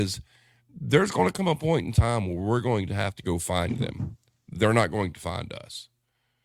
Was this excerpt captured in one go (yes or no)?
yes